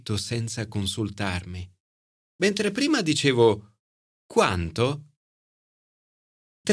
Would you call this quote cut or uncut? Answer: cut